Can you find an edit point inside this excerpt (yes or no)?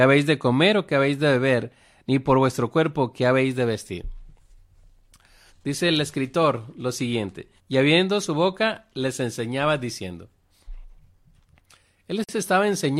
yes